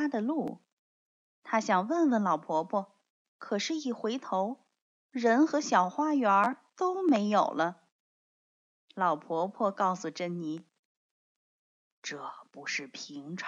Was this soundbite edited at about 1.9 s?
no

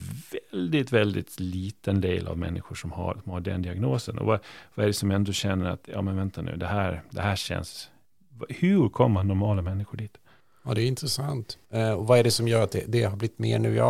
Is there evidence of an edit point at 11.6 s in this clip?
yes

